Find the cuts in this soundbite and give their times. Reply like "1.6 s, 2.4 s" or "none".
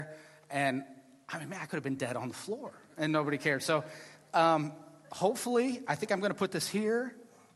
none

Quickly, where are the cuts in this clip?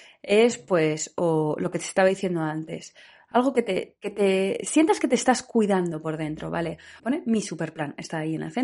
7.0 s

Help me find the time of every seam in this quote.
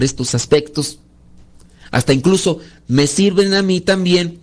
none

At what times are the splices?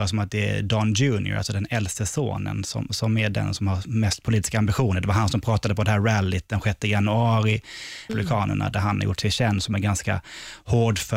8.1 s

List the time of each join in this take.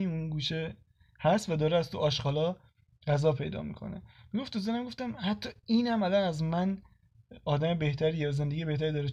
none

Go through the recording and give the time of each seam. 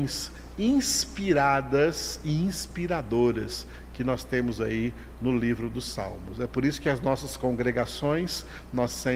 none

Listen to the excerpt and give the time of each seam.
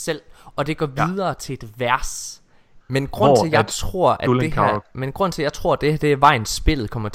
2.8 s

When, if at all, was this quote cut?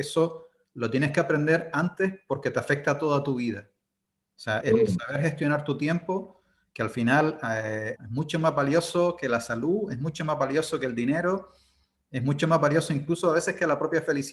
4.6 s, 8.0 s

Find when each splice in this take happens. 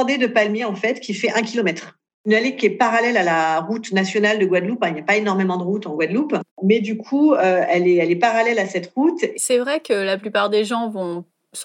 6.5 s, 9.3 s

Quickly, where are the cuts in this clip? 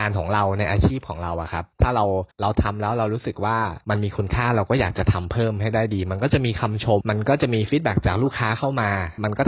7.0 s

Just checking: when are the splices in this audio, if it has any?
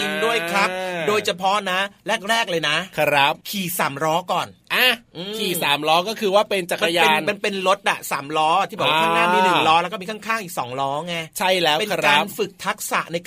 3.4 s

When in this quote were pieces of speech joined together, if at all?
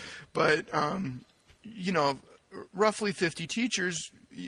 none

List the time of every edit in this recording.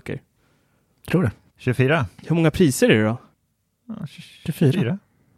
1.5 s

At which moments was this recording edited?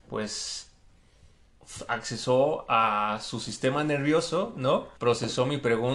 5.0 s

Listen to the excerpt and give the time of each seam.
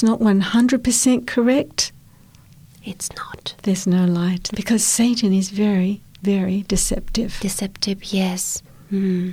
4.5 s

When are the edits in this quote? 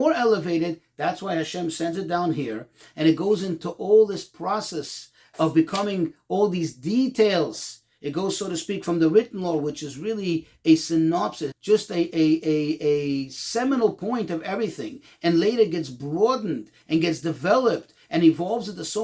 11.5 s

